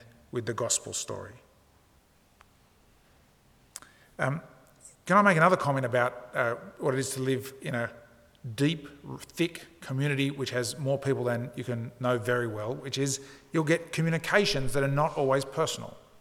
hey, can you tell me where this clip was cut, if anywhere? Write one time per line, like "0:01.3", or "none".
none